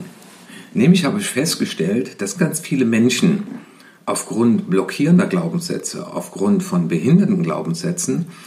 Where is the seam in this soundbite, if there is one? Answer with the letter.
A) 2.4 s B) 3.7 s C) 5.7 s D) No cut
A